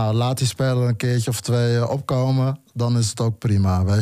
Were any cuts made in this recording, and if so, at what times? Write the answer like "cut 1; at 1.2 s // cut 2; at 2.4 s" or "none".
none